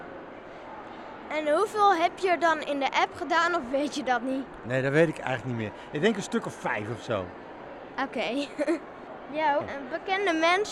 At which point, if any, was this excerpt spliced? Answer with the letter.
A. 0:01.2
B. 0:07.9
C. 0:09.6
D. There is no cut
C